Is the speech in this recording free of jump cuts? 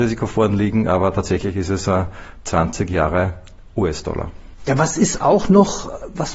no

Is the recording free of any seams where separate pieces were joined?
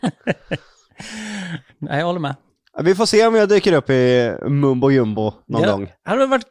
yes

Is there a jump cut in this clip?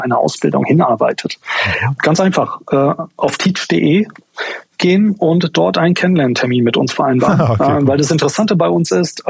yes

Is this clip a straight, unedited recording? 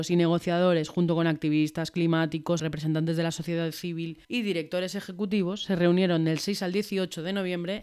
no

